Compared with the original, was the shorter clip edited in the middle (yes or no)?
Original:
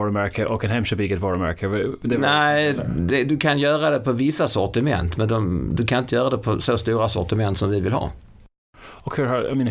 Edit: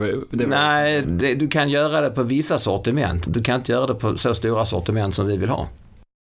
yes